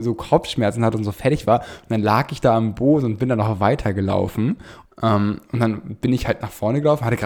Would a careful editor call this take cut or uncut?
cut